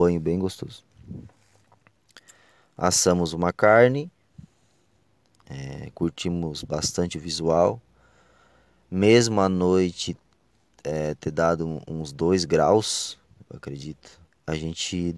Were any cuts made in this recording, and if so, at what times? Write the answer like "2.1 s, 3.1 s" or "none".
none